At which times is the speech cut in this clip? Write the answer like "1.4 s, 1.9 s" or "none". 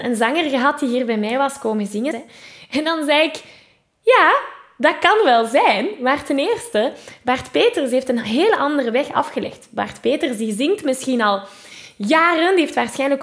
2.1 s